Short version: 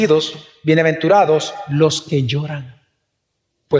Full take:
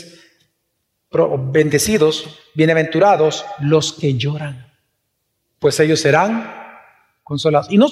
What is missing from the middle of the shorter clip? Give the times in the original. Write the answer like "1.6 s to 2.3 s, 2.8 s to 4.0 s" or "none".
none